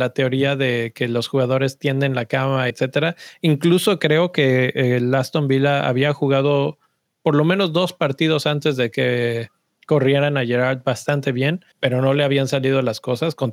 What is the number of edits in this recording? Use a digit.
2